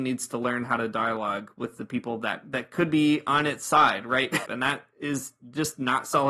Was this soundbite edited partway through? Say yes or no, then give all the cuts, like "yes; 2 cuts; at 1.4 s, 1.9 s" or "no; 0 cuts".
yes; 1 cut; at 4.5 s